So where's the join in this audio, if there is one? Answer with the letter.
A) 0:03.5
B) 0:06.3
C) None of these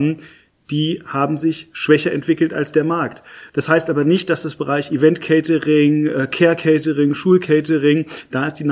A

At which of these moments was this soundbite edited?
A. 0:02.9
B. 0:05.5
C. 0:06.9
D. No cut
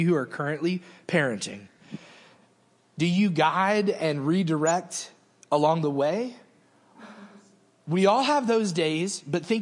C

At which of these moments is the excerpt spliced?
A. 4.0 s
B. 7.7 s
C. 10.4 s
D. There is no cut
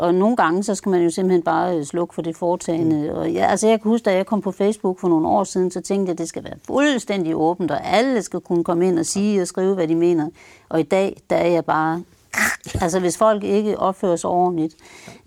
D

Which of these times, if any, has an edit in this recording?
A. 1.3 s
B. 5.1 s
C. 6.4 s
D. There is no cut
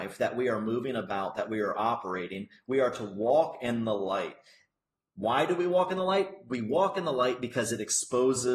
D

